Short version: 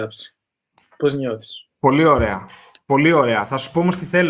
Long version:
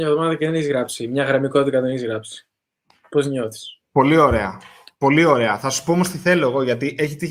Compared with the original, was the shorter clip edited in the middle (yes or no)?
no